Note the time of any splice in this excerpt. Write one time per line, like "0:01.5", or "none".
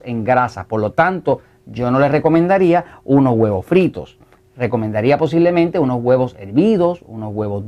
none